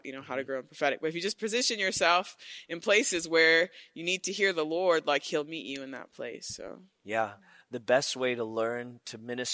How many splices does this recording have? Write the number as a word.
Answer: zero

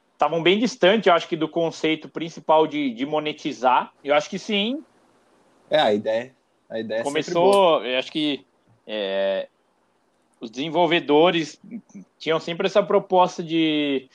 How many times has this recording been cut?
two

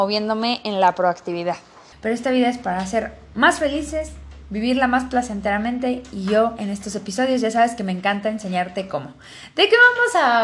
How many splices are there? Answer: one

